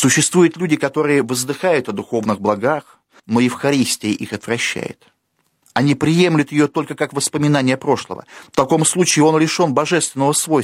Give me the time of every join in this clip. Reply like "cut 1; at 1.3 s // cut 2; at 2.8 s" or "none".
cut 1; at 3.2 s // cut 2; at 8.5 s